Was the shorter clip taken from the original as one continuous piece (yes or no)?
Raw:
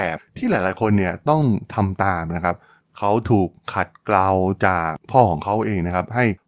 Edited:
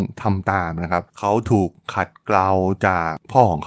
no